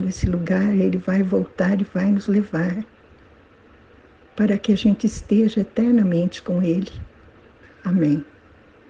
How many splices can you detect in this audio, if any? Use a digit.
1